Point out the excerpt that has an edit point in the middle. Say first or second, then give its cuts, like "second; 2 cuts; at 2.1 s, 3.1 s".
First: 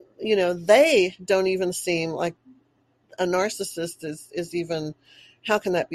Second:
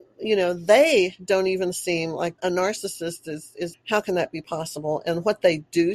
second; 2 cuts; at 2.4 s, 3.7 s